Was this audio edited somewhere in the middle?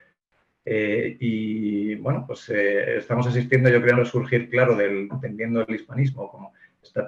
yes; 2 cuts; at 4.0 s, 5.1 s

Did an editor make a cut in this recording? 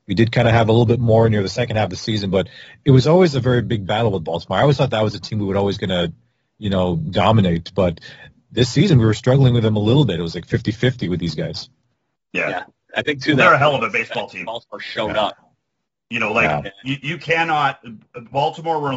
no; 0 cuts

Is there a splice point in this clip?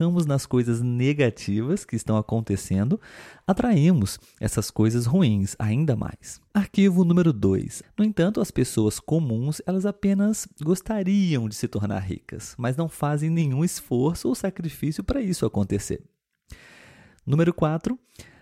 yes; 1 cut; at 7.8 s

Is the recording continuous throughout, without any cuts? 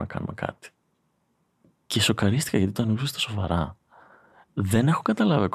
yes; 0 cuts

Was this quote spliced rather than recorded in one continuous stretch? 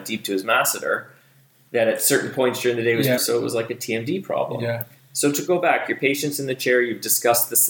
yes; 1 cut; at 3.2 s

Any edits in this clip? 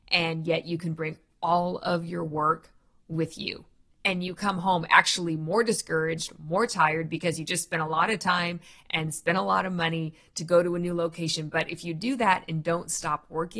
no; 0 cuts

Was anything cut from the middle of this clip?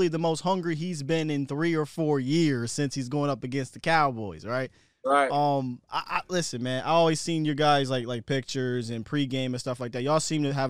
no; 0 cuts

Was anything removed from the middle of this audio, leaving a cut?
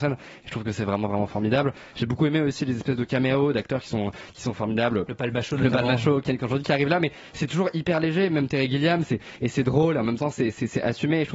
yes; 1 cut; at 6.2 s

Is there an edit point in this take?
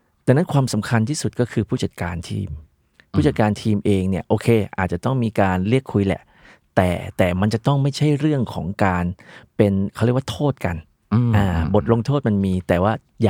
no; 0 cuts

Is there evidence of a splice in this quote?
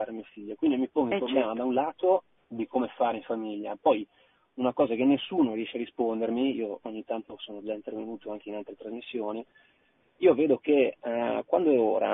no; 0 cuts

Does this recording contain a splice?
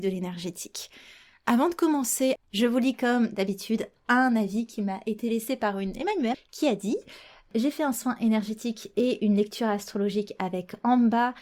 yes; 2 cuts; at 2.4 s, 6.3 s

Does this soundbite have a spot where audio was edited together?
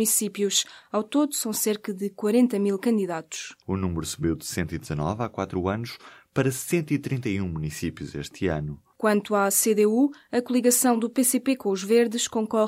yes; 2 cuts; at 3.6 s, 8.9 s

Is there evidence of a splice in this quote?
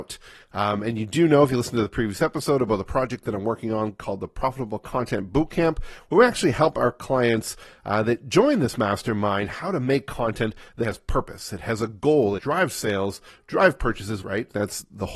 yes; 3 cuts; at 10.8 s, 12.4 s, 14.2 s

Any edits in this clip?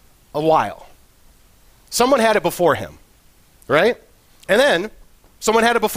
no; 0 cuts

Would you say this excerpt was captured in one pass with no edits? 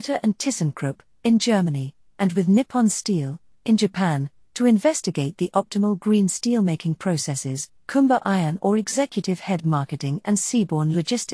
yes; 0 cuts

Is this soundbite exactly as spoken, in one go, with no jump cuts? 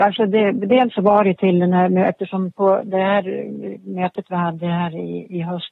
yes; 0 cuts

